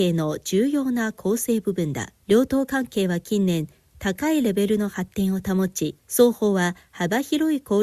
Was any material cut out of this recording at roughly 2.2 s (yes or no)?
yes